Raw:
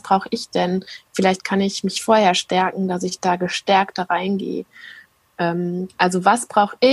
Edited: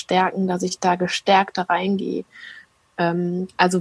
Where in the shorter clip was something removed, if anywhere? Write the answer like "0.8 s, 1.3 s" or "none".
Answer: none